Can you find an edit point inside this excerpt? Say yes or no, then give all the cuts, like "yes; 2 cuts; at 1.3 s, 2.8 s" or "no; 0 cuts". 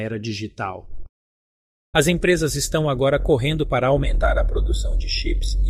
yes; 1 cut; at 1.9 s